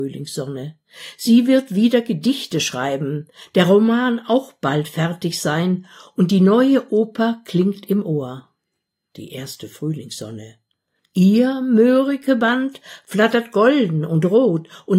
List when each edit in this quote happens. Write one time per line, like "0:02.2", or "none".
0:09.1
0:11.0